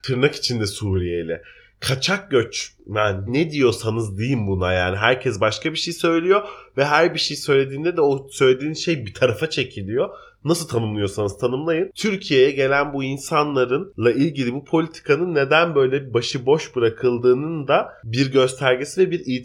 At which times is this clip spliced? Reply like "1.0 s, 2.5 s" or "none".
3.3 s